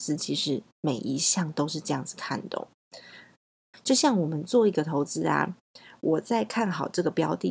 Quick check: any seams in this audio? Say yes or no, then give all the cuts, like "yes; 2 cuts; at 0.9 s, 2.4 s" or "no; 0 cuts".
yes; 1 cut; at 3.7 s